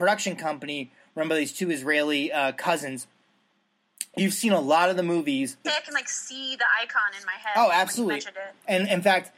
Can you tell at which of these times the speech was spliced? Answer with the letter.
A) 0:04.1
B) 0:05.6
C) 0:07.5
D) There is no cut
B